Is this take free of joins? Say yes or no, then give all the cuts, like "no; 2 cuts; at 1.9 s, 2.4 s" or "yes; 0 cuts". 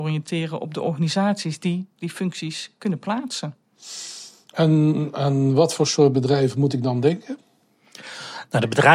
yes; 0 cuts